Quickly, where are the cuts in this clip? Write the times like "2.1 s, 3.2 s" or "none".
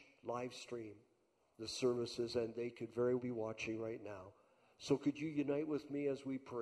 3.2 s